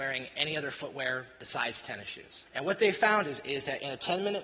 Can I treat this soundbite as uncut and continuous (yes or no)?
no